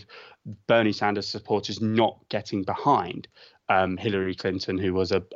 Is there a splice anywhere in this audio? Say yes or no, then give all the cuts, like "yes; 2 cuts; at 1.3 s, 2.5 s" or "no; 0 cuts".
no; 0 cuts